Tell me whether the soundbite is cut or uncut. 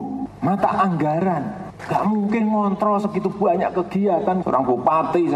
cut